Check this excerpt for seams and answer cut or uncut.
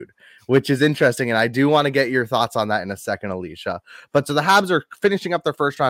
uncut